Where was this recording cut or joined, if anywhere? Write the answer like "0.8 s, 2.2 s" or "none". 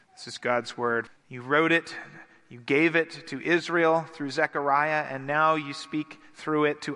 1.1 s